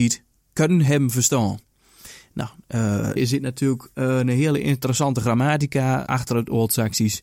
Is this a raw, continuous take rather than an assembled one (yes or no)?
no